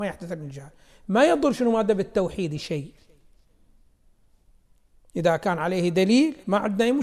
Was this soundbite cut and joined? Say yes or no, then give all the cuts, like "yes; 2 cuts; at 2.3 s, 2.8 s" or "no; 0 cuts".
no; 0 cuts